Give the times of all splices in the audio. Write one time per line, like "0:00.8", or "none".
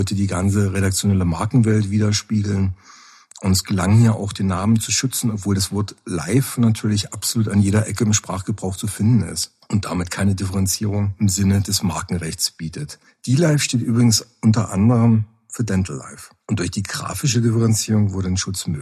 none